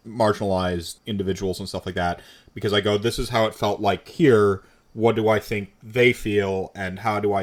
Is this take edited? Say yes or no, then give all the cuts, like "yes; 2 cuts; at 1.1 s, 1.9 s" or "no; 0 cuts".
yes; 1 cut; at 1.0 s